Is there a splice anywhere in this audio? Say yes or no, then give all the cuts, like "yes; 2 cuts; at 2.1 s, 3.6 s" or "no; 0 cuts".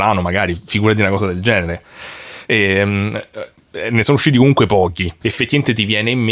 yes; 2 cuts; at 2.5 s, 5.2 s